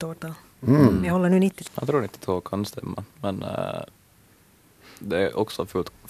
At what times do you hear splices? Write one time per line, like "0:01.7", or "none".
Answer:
0:01.7
0:03.1